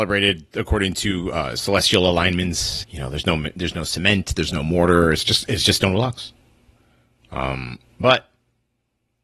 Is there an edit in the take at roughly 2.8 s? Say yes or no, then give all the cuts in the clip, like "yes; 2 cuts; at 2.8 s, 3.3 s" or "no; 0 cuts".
yes; 1 cut; at 2.8 s